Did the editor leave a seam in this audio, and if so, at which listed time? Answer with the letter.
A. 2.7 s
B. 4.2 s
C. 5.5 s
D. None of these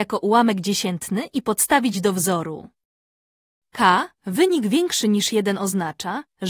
B